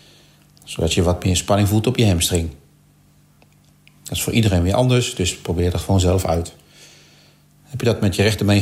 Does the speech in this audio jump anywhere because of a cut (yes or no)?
no